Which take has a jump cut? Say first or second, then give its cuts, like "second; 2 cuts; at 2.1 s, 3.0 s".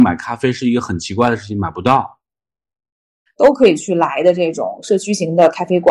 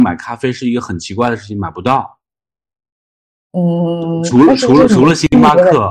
first; 1 cut; at 3.3 s